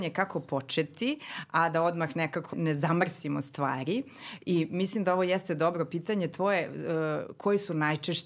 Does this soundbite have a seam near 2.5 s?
yes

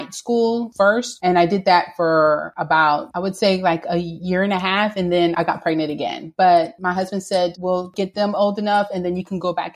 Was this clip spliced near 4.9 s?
no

